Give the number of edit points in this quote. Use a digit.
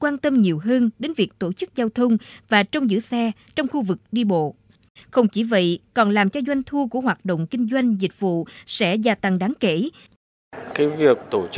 1